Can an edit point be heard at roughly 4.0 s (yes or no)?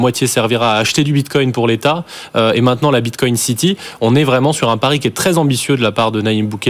no